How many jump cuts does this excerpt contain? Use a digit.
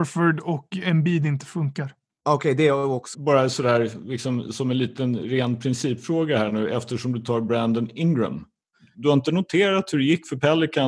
2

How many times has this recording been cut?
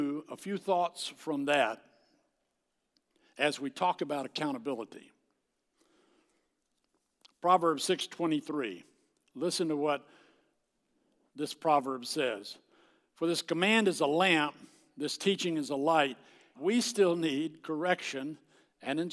1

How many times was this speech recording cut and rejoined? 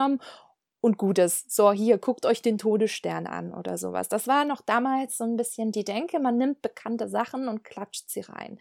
0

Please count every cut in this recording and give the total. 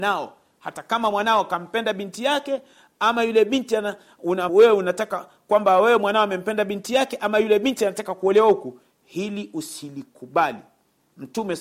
1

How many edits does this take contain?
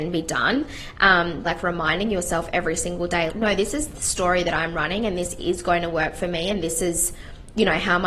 2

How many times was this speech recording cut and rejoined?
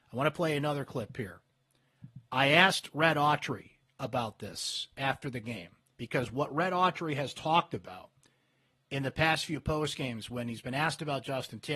0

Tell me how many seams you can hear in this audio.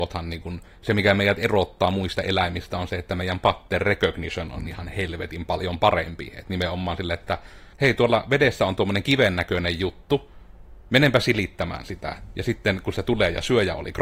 1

